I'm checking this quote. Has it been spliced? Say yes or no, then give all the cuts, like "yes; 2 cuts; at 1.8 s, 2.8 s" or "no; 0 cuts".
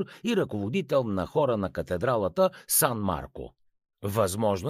no; 0 cuts